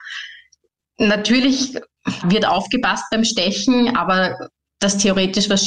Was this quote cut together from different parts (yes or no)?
yes